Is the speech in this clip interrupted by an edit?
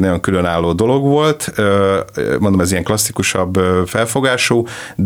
no; 0 cuts

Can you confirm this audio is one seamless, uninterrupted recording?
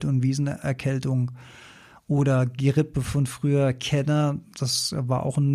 yes; 0 cuts

